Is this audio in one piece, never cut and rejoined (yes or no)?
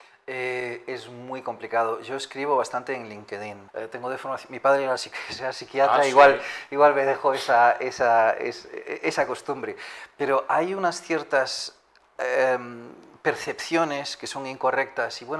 no